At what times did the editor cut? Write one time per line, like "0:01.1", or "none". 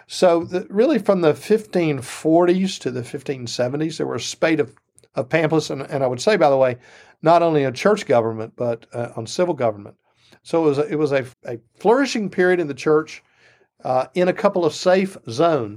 0:11.3